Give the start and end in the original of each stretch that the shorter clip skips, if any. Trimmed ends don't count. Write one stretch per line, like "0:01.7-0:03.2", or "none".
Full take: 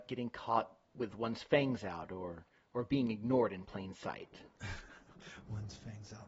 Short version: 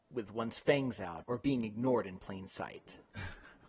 0:02.1-0:02.7